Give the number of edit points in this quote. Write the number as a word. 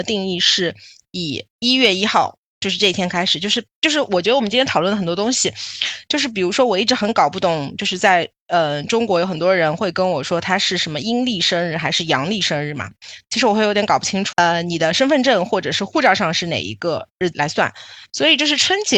three